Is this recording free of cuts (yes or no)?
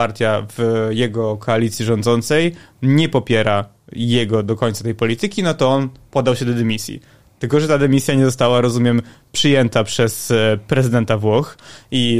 yes